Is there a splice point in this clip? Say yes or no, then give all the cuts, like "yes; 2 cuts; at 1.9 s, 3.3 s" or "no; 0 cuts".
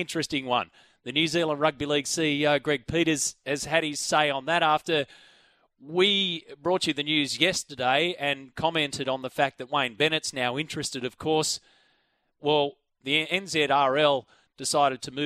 no; 0 cuts